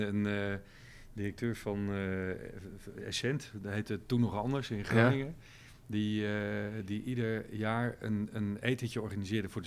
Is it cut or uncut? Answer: uncut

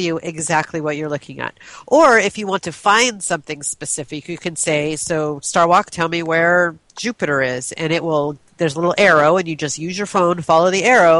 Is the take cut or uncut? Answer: uncut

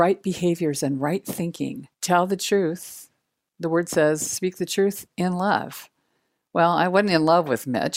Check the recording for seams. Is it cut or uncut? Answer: cut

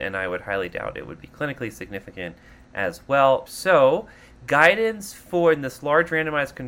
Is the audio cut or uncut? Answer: cut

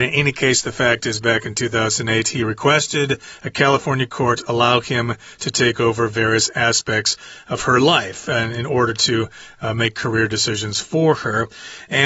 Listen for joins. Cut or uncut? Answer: uncut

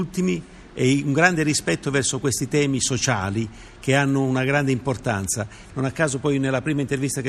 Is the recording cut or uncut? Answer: cut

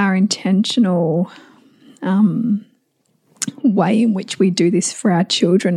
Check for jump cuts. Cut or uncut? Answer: uncut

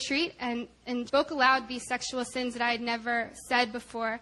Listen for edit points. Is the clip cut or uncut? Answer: cut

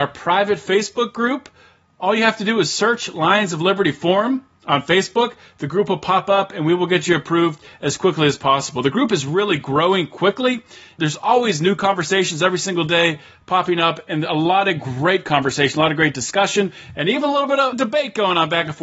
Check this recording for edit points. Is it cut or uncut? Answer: uncut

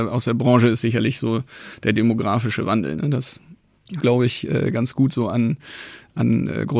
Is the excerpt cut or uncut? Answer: cut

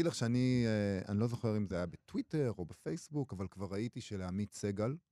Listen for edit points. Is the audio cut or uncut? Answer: uncut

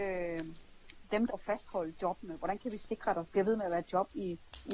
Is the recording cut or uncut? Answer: cut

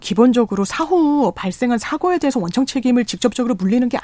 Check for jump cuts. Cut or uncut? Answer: uncut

